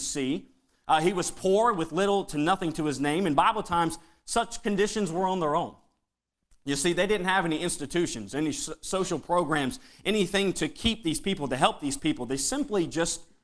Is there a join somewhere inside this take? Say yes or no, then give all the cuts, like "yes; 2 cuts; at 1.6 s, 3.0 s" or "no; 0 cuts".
no; 0 cuts